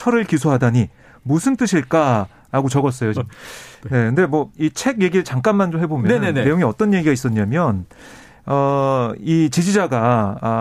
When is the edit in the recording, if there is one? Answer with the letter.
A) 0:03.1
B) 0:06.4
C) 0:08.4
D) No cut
A